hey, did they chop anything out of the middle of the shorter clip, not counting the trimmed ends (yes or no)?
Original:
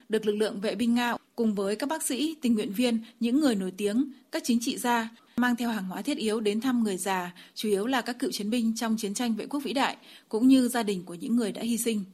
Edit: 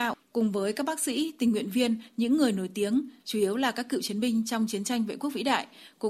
yes